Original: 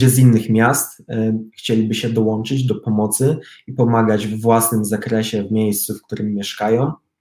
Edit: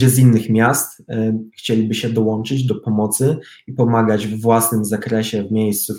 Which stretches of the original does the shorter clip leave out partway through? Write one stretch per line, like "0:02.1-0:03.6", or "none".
none